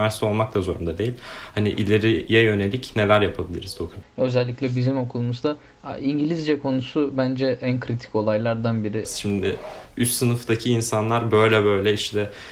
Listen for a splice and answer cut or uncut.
cut